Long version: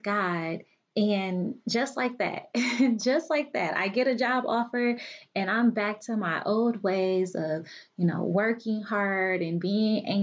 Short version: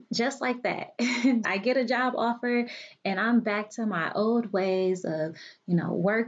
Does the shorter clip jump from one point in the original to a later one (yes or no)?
yes